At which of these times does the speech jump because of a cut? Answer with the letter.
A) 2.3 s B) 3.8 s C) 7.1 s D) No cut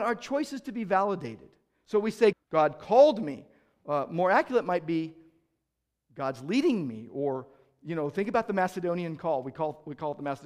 A